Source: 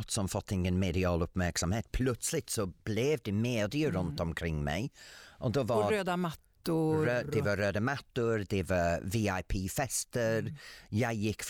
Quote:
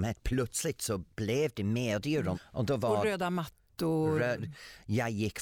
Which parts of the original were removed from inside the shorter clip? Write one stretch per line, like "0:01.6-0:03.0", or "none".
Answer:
0:04.0-0:05.2
0:07.2-0:10.4